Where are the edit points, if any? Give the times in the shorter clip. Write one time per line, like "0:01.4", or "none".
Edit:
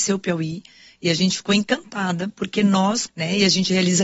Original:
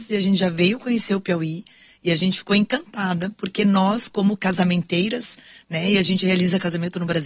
0:03.1